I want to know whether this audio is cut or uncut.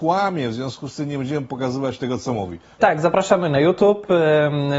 cut